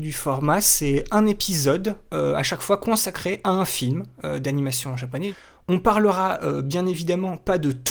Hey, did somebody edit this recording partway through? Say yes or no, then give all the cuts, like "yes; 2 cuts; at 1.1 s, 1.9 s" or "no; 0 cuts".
no; 0 cuts